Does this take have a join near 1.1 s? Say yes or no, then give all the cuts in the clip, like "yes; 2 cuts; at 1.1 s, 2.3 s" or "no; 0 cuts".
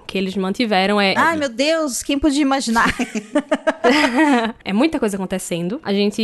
yes; 1 cut; at 1.1 s